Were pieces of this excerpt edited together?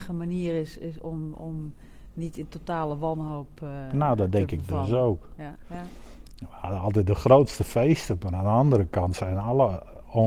yes; 1 cut; at 5.6 s

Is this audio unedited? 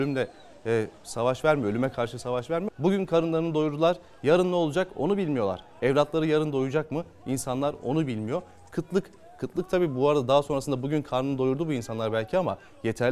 no; 1 cut; at 2.7 s

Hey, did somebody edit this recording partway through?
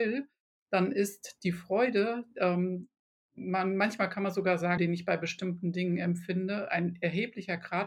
yes; 1 cut; at 4.8 s

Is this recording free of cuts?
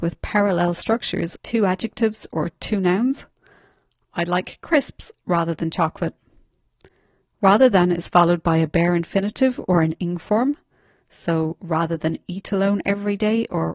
no; 1 cut; at 1.4 s

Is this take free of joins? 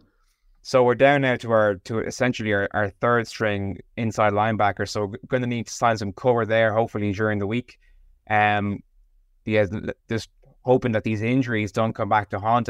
yes; 0 cuts

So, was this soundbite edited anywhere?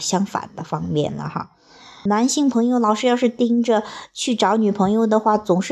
yes; 1 cut; at 2.1 s

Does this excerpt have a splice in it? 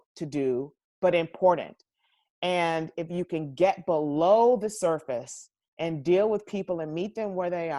no; 0 cuts

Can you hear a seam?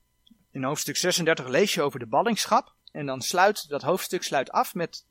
yes; 1 cut; at 2.9 s

